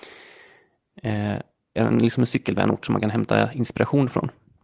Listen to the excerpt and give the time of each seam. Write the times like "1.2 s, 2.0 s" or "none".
1.8 s